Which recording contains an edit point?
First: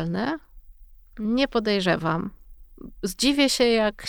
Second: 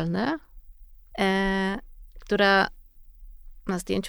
second; 1 cut; at 1.1 s

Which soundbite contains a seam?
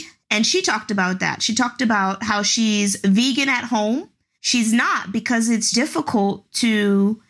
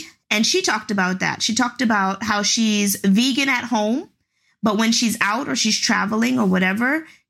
first; 2 cuts; at 4.3 s, 5.7 s

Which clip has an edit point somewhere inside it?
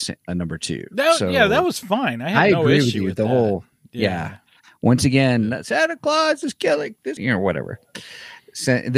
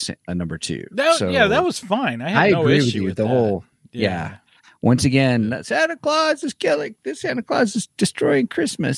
first; 1 cut; at 7.2 s

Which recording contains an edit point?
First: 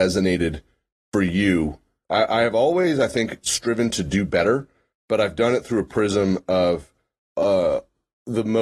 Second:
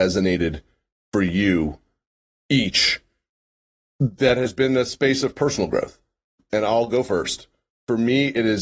first; 1 cut; at 2.0 s

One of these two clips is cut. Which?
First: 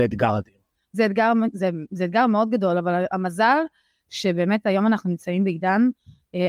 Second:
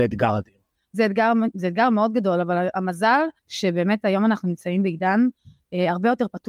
second; 2 cuts; at 1.5 s, 3.4 s

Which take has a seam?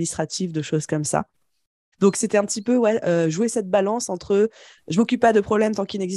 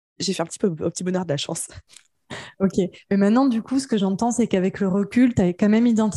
first; 1 cut; at 1.9 s

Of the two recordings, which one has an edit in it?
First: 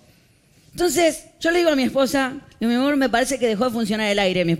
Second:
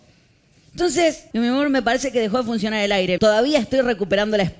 second; 2 cuts; at 1.3 s, 3.2 s

